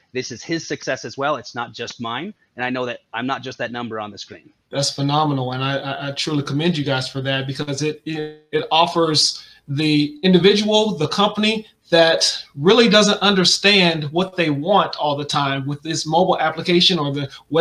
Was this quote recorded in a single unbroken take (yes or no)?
no